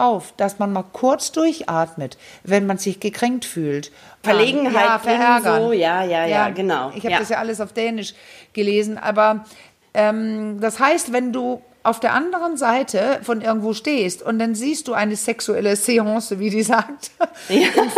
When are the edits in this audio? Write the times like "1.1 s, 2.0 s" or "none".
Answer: 4.2 s